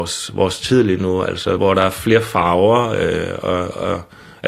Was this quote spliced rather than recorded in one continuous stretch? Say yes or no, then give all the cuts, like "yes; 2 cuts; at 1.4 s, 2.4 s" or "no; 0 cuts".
yes; 1 cut; at 1.6 s